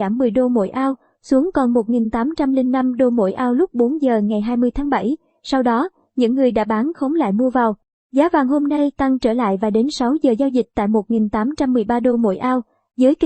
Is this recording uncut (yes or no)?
yes